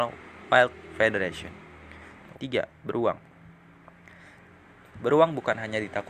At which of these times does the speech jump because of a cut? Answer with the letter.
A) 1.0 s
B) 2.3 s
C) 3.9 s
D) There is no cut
B